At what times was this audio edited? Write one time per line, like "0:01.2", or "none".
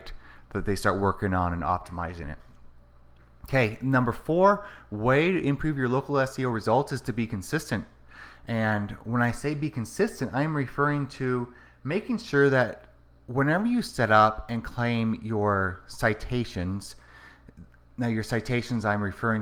none